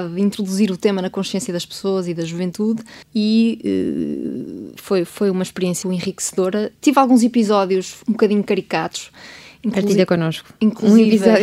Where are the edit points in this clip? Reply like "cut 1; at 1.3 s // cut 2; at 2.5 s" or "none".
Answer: cut 1; at 3.0 s // cut 2; at 5.8 s